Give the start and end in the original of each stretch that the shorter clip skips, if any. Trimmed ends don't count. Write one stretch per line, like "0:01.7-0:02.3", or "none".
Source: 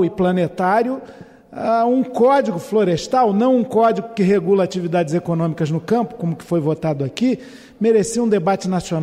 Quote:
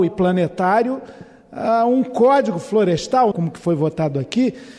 0:03.3-0:06.2